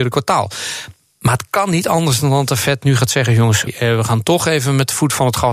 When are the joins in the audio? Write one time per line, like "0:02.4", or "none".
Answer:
0:03.7